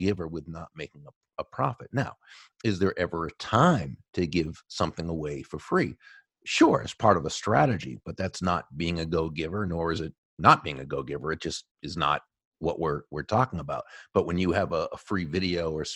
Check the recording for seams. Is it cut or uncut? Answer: uncut